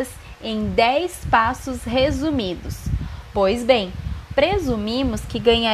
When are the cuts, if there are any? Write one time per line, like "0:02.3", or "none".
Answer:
0:03.2
0:04.4